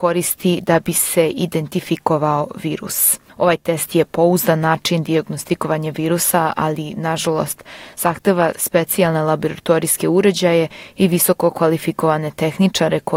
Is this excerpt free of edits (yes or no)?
no